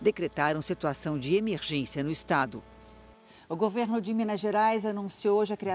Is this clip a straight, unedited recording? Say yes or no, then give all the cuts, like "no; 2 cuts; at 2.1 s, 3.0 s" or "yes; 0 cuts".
yes; 0 cuts